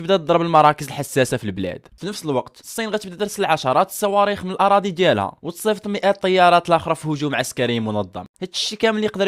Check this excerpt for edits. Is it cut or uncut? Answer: uncut